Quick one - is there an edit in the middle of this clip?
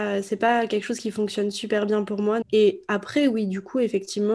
yes; 1 cut; at 2.4 s

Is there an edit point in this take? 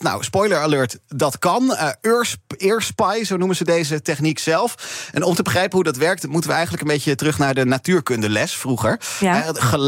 no; 0 cuts

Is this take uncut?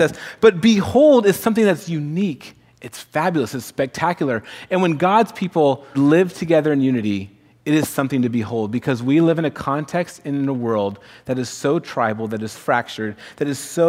no; 2 cuts; at 5.9 s, 12.5 s

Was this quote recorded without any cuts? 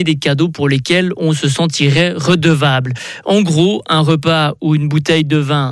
yes; 0 cuts

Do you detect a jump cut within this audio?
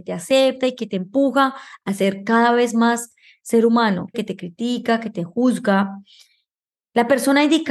yes; 1 cut; at 4.1 s

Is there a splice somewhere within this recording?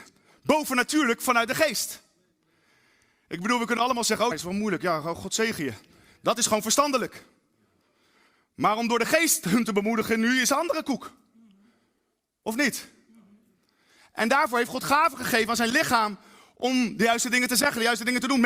yes; 1 cut; at 4.3 s

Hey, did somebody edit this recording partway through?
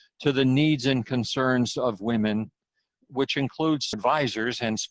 yes; 1 cut; at 3.9 s

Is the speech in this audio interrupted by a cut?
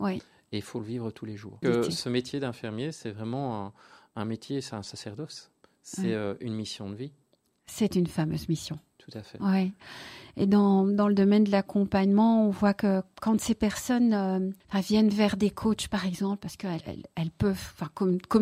yes; 3 cuts; at 1.6 s, 14.6 s, 16.8 s

